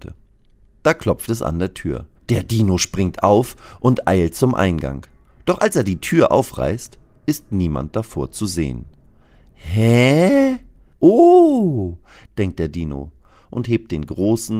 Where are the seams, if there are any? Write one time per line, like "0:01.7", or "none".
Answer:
0:02.2
0:10.9
0:12.2